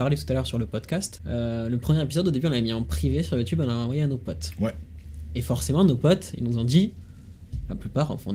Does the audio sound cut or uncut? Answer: uncut